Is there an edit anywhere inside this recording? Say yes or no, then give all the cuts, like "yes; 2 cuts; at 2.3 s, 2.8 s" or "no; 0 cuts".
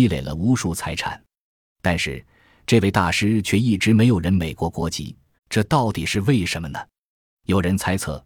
yes; 1 cut; at 5.4 s